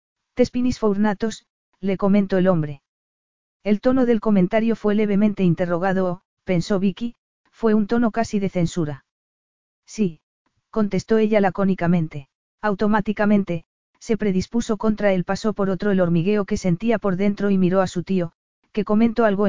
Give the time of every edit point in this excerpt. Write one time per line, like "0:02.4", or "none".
0:06.4
0:12.4

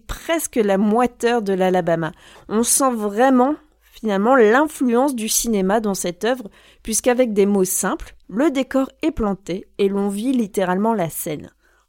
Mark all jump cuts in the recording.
0:02.4

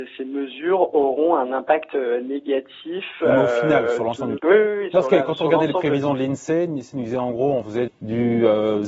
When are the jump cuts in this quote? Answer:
0:04.4
0:07.9

